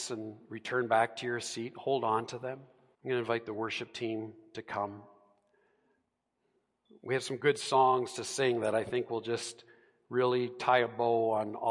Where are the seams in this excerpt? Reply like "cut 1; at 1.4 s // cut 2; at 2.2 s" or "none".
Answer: cut 1; at 2.9 s